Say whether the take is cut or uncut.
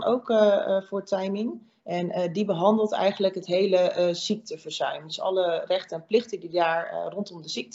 uncut